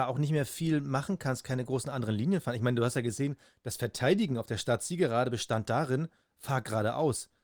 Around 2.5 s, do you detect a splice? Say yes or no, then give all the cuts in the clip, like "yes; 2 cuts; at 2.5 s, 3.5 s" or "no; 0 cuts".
no; 0 cuts